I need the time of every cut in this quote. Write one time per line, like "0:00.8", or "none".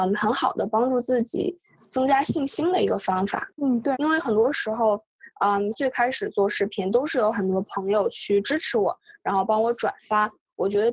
0:03.9
0:05.7